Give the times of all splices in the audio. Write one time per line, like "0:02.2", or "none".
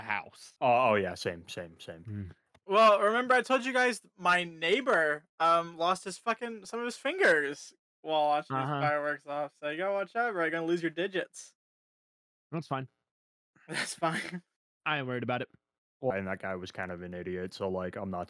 0:16.1